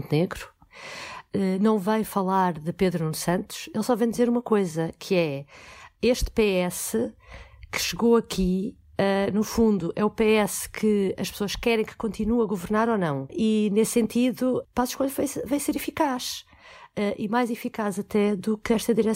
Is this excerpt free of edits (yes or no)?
yes